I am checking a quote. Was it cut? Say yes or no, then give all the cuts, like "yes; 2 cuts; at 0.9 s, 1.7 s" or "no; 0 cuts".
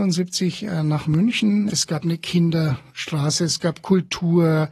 yes; 1 cut; at 1.7 s